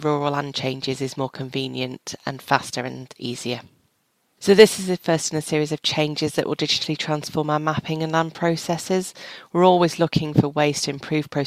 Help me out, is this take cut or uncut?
cut